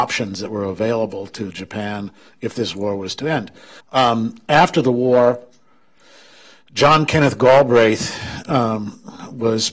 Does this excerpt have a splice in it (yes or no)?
yes